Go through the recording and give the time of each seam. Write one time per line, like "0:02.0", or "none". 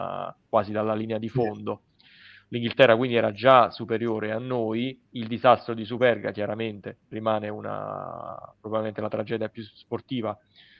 0:05.1
0:07.1